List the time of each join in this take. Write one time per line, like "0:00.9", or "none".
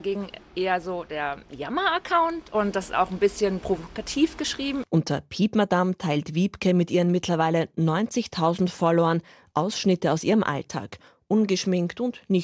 none